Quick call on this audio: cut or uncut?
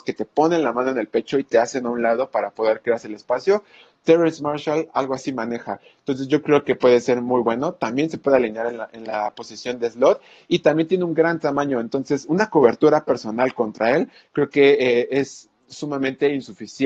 uncut